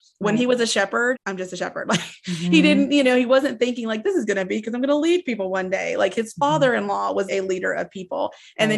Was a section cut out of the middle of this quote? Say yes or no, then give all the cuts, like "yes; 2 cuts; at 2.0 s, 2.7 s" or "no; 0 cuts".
yes; 2 cuts; at 1.2 s, 7.3 s